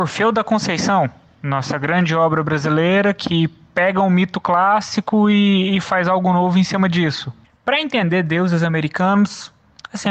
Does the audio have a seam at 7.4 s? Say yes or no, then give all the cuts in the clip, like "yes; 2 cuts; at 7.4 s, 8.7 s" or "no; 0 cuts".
yes; 1 cut; at 7.4 s